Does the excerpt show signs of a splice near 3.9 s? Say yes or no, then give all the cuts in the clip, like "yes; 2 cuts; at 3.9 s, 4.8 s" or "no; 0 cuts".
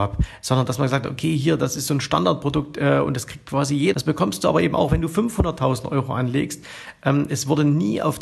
yes; 1 cut; at 3.9 s